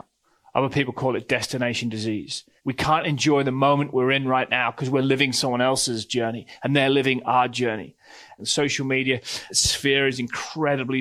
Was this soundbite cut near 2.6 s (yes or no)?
yes